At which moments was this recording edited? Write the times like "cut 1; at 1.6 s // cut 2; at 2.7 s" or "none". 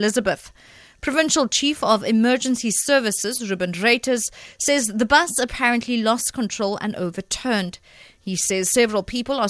none